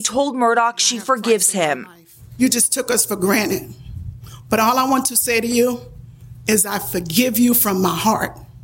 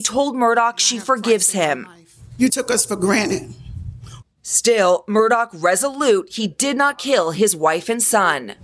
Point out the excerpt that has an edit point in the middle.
second; 2 cuts; at 2.5 s, 4.2 s

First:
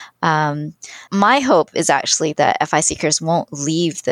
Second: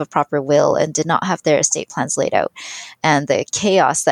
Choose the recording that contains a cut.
first; 1 cut; at 1.1 s

